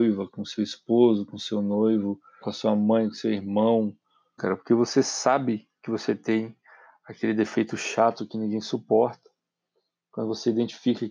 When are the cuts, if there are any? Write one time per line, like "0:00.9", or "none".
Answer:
0:02.4
0:04.4